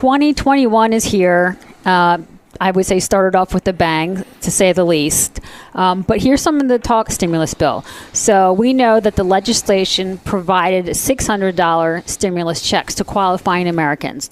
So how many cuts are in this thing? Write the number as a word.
one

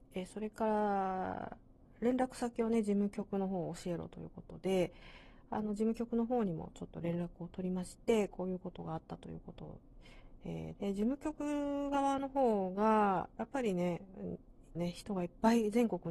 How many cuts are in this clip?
two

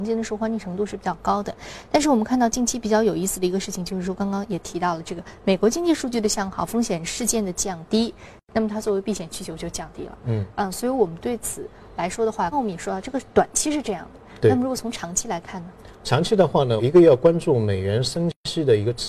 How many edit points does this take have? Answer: two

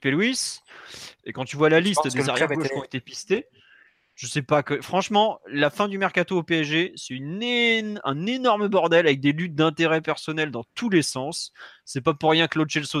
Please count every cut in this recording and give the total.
one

